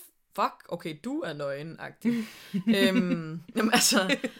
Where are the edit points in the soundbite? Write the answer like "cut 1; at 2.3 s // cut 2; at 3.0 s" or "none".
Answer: none